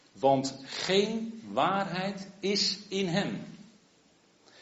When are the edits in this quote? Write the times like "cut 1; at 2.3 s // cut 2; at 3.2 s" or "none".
none